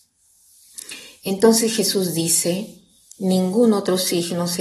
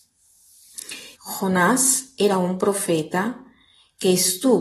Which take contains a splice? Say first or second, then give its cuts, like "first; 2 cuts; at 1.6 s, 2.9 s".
second; 1 cut; at 1.1 s